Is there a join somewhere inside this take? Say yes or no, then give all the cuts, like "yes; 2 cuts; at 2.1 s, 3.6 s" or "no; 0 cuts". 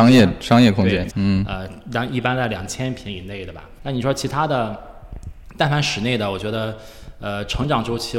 yes; 2 cuts; at 1.1 s, 3.8 s